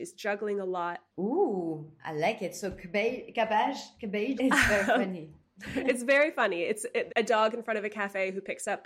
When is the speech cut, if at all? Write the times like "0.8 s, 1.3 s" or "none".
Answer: 1.1 s, 4.4 s, 7.1 s

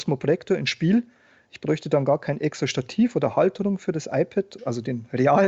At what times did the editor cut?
4.6 s

